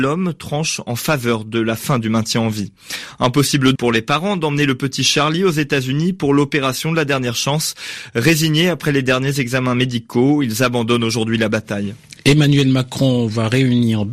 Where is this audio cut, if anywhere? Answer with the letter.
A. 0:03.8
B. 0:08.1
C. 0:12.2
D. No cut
A